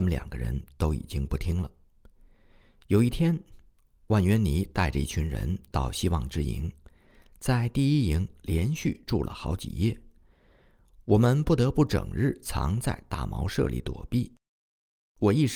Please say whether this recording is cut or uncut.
uncut